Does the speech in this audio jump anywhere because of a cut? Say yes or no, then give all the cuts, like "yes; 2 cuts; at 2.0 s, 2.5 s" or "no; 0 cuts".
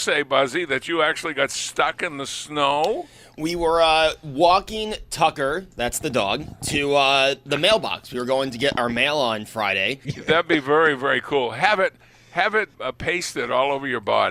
yes; 2 cuts; at 10.0 s, 12.7 s